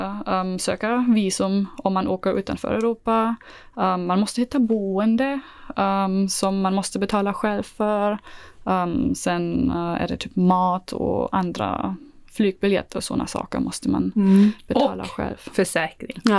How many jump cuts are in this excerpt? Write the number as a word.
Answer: zero